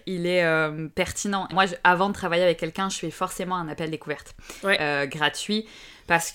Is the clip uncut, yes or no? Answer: no